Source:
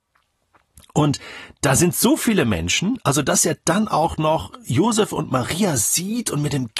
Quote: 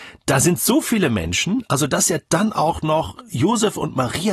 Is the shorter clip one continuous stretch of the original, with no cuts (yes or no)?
yes